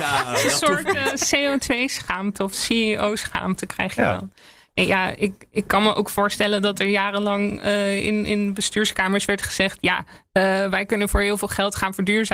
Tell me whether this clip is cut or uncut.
uncut